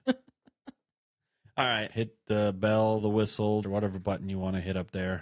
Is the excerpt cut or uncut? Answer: cut